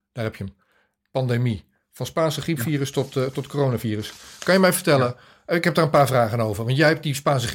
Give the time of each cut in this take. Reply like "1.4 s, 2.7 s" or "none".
none